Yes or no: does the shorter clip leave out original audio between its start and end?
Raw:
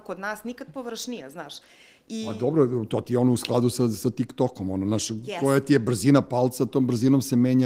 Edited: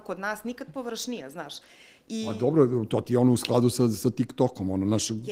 no